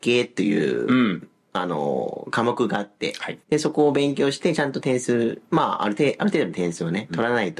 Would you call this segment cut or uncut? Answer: cut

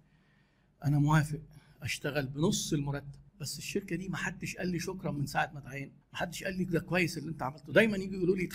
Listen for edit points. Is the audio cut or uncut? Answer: cut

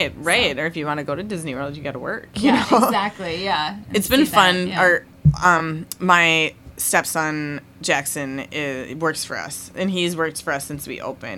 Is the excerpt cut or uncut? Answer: uncut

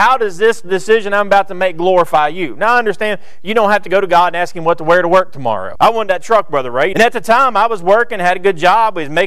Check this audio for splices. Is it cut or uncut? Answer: cut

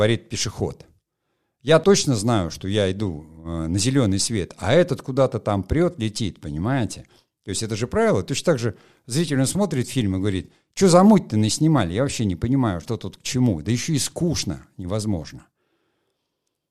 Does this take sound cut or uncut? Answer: cut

